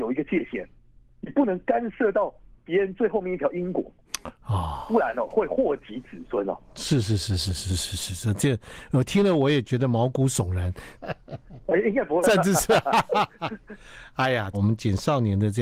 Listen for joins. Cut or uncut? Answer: cut